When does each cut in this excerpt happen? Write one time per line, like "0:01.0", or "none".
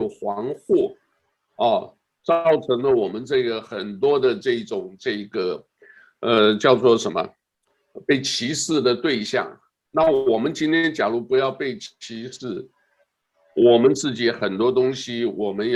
none